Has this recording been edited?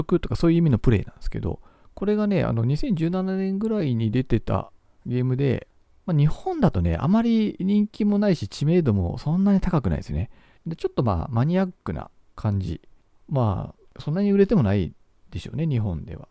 yes; 1 cut; at 10.6 s

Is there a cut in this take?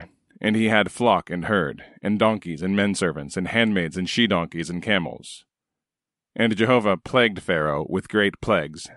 no; 0 cuts

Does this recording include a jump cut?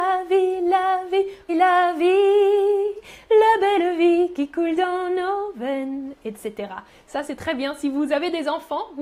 yes; 1 cut; at 1.5 s

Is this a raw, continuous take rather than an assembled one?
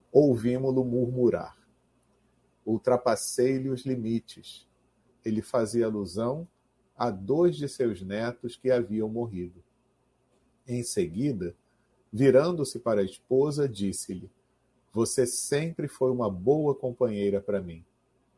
no; 2 cuts; at 2.5 s, 5.1 s

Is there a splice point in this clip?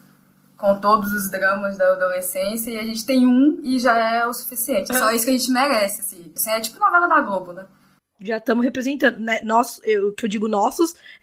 yes; 3 cuts; at 4.9 s, 6.4 s, 8.0 s

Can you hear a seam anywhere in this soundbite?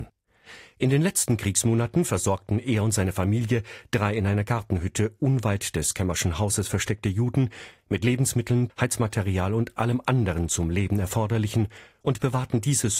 yes; 1 cut; at 8.7 s

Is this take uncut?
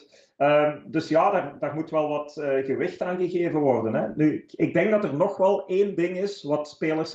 yes; 0 cuts

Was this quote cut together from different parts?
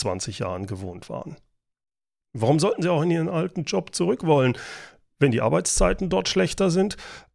yes; 1 cut; at 2.2 s

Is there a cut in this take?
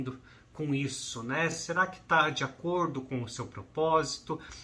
no; 0 cuts

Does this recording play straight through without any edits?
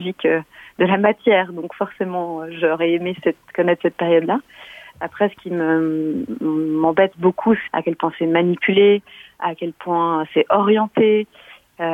no; 2 cuts; at 4.9 s, 7.7 s

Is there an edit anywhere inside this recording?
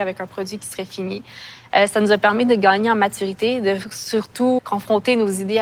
yes; 1 cut; at 4.6 s

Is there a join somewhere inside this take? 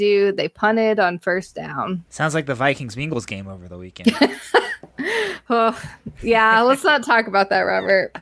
yes; 1 cut; at 2.1 s

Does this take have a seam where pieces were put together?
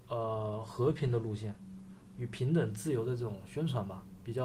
no; 0 cuts

